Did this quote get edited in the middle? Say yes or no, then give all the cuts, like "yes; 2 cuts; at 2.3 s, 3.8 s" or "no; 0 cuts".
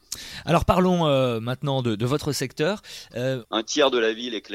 yes; 1 cut; at 3.4 s